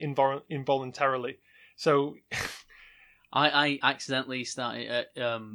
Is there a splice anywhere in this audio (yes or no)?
no